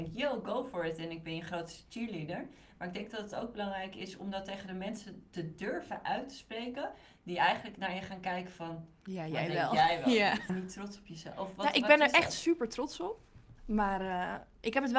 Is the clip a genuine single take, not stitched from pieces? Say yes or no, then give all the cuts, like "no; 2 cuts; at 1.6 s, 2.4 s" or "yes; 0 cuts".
no; 2 cuts; at 10.5 s, 13.6 s